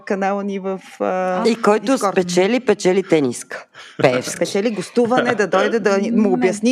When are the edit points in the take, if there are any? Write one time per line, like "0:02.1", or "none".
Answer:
none